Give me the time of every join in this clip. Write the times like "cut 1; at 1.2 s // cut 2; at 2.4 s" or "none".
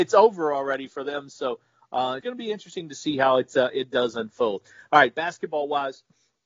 cut 1; at 2.2 s